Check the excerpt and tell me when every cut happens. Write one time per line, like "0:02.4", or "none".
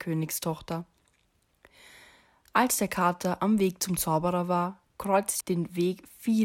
0:05.4